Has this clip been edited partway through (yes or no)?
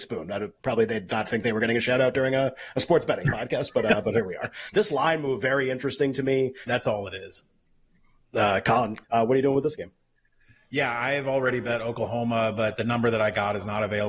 yes